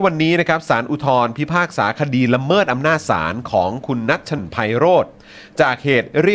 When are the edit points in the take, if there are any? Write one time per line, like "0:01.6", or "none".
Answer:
0:04.4